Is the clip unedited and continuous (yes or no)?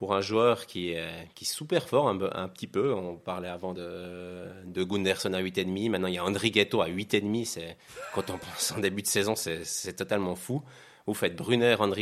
yes